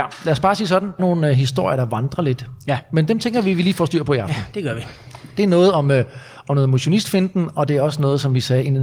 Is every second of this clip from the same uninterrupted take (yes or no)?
no